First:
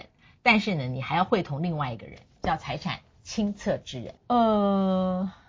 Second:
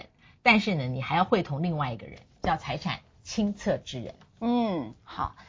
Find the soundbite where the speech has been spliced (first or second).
first